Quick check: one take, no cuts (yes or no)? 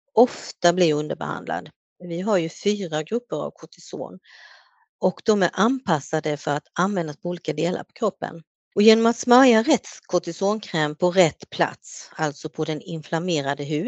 no